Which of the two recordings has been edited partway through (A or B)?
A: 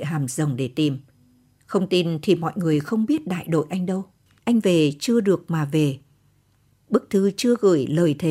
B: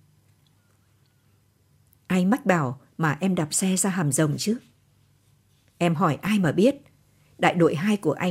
A